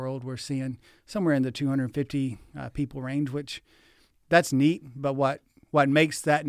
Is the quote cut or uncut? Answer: uncut